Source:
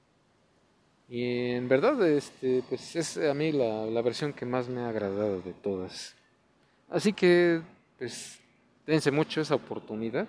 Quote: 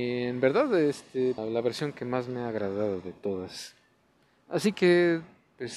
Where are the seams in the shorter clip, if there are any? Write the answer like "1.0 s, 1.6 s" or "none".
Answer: 1.4 s

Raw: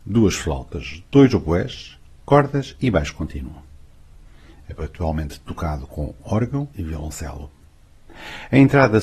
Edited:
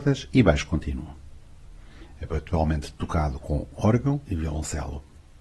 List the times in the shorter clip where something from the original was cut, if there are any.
none

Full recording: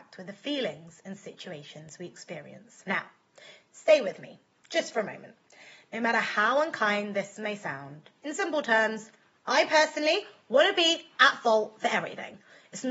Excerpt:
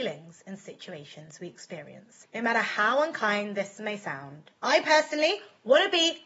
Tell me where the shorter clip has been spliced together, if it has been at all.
2.2 s, 4.6 s

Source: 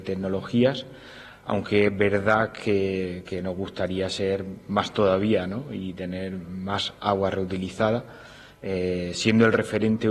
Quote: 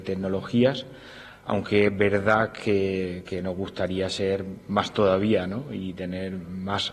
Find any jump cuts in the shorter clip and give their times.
none

